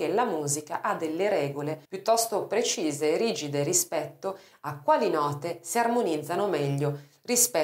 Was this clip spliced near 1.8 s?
yes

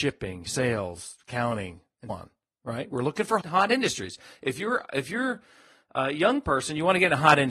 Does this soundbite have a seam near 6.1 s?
no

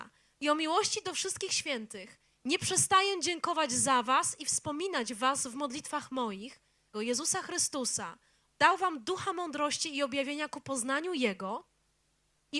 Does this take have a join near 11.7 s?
no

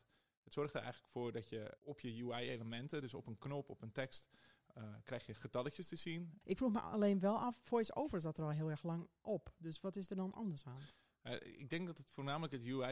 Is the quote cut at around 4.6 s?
no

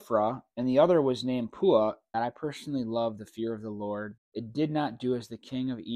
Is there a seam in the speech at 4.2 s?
yes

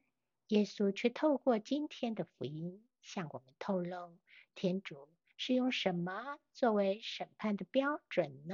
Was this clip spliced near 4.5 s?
yes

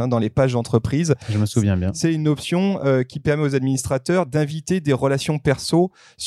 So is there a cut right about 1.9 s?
no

